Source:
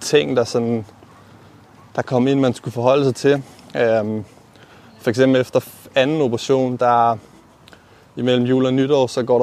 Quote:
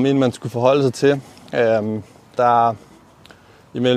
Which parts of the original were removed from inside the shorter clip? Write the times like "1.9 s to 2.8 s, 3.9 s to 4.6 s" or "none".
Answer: 4.6 s to 6.8 s

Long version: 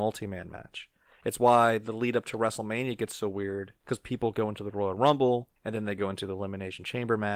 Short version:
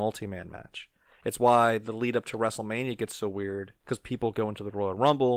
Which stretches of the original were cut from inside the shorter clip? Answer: none

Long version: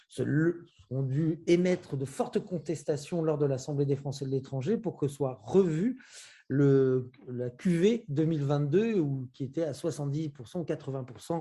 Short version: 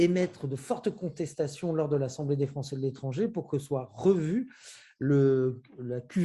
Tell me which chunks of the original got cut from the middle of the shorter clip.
none

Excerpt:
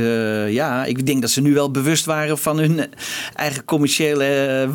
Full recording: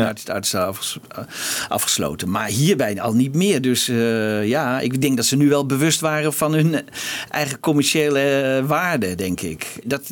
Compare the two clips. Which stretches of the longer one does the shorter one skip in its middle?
none

